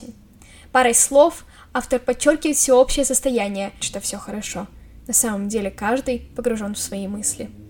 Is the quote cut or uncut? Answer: cut